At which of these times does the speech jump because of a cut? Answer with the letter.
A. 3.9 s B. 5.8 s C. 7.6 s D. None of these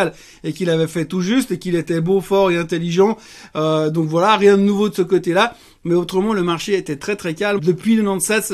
C